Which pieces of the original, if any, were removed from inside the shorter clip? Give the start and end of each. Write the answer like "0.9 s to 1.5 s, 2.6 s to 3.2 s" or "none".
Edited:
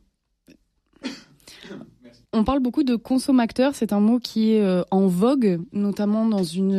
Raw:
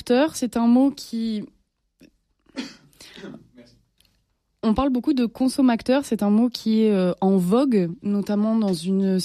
3.8 s to 4.6 s